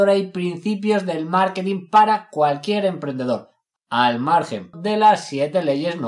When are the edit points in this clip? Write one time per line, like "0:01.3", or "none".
0:04.7

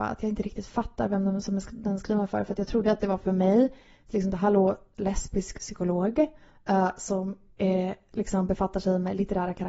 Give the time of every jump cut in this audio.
none

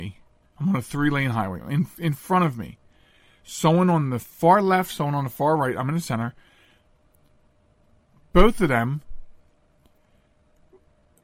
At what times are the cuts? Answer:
none

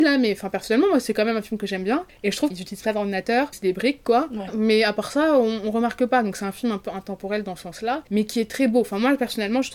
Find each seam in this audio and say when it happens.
0:02.5
0:03.5

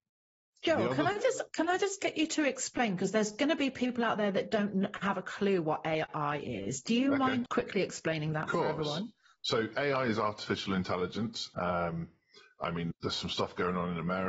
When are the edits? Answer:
0:07.5
0:11.5
0:12.9

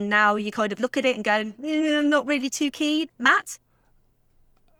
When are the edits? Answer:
none

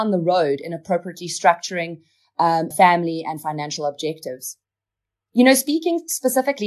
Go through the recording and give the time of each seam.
0:02.7

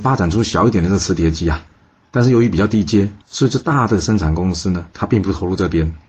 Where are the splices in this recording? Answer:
0:03.2

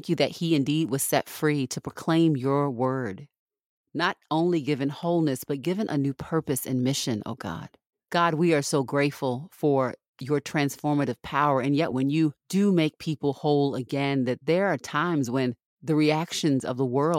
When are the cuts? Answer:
0:07.9
0:11.9

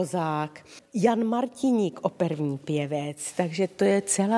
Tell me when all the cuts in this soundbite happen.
none

